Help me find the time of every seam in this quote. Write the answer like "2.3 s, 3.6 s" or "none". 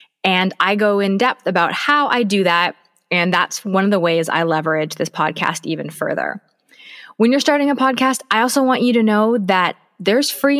none